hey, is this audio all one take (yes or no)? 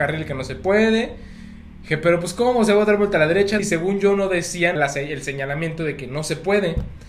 no